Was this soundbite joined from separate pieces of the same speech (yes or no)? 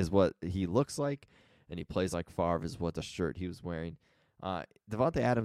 no